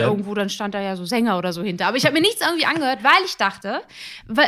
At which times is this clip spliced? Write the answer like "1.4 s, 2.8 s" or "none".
none